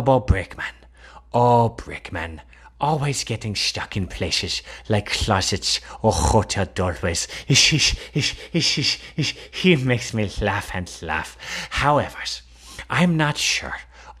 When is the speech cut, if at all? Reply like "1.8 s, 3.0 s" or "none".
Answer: none